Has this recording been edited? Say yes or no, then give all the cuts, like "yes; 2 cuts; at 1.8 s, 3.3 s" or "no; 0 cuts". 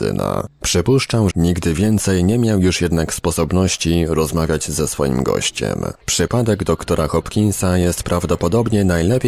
yes; 2 cuts; at 1.3 s, 6.0 s